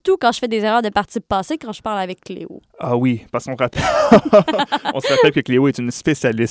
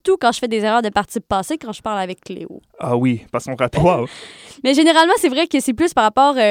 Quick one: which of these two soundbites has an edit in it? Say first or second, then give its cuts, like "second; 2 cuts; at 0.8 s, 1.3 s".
second; 1 cut; at 3.7 s